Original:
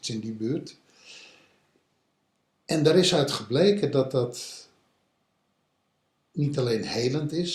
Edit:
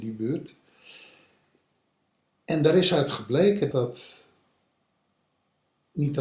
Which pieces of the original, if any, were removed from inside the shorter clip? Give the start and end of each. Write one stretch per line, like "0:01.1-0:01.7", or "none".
0:03.9-0:04.1